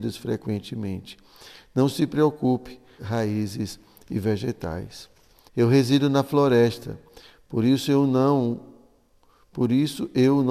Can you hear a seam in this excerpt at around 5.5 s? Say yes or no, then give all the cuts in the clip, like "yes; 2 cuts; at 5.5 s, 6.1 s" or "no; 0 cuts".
yes; 2 cuts; at 3.0 s, 5.5 s